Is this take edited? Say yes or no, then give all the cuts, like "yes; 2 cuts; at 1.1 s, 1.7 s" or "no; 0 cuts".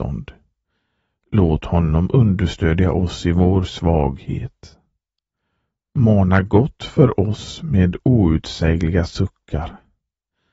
no; 0 cuts